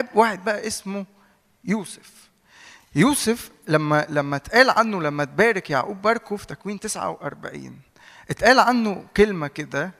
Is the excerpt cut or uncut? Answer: uncut